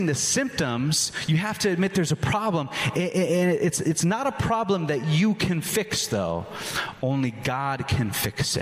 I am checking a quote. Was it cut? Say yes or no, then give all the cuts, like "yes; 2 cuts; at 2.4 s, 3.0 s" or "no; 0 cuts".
no; 0 cuts